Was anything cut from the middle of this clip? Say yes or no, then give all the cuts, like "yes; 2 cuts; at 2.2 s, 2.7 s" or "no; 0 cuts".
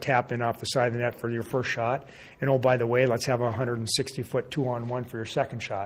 no; 0 cuts